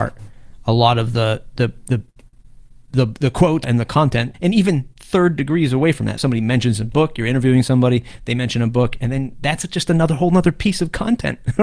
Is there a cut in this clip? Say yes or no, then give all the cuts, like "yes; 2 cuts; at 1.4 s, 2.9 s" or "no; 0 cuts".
no; 0 cuts